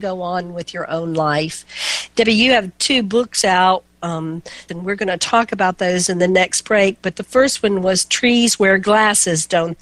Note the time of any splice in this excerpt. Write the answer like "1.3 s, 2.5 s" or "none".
4.7 s